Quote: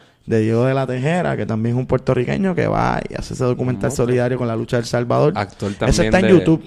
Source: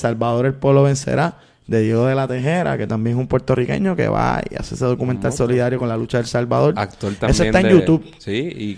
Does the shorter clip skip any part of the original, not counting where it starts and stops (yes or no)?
no